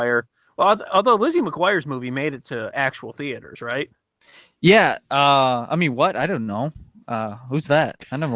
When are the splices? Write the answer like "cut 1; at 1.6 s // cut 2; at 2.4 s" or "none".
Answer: none